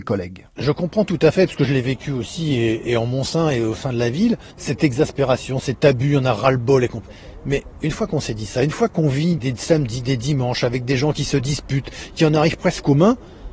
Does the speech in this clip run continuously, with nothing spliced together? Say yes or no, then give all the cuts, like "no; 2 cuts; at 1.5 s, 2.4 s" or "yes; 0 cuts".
no; 1 cut; at 9.4 s